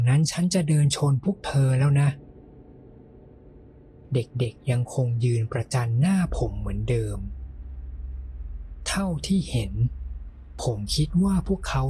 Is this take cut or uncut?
uncut